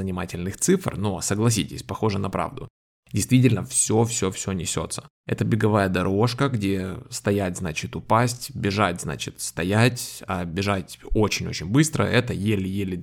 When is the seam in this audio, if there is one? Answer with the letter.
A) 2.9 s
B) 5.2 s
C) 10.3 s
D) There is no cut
B